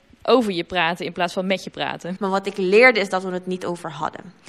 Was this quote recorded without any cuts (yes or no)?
no